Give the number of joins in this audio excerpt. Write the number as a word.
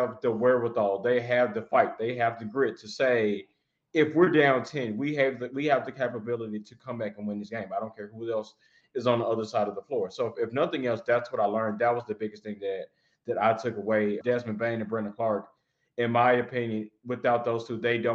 one